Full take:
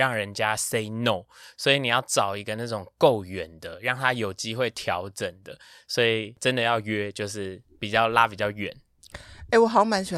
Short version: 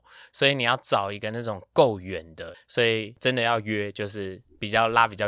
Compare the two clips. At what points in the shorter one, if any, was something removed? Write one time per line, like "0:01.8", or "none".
0:02.5